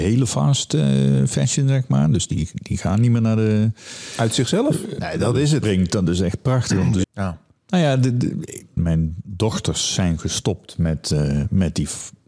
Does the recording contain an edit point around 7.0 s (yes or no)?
yes